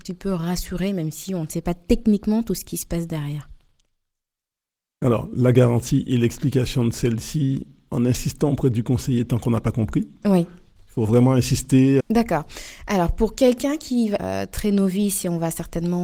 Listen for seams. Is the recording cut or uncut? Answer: cut